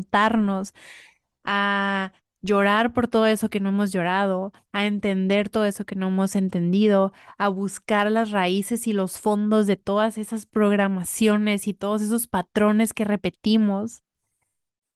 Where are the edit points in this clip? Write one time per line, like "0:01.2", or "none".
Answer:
none